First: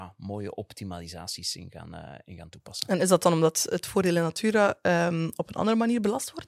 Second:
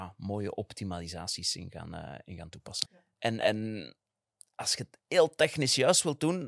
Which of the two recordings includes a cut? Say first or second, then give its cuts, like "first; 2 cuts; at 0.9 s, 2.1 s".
second; 1 cut; at 2.8 s